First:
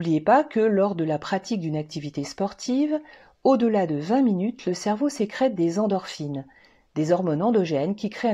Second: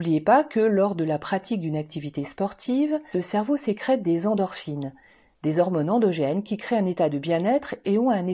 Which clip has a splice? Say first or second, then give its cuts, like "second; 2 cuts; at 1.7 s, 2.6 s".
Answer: second; 1 cut; at 3.1 s